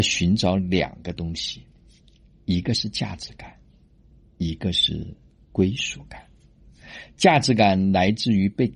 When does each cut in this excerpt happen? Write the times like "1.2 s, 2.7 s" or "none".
none